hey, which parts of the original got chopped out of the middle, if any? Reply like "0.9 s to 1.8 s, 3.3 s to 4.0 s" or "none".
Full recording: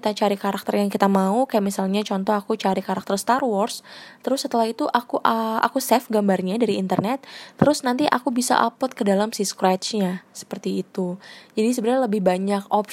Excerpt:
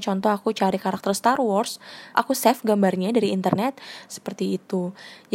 4.2 s to 5.6 s, 7.5 s to 10.3 s